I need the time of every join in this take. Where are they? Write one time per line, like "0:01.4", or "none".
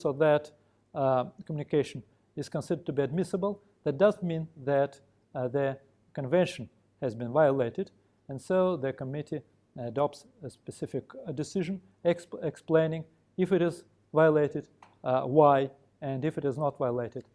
none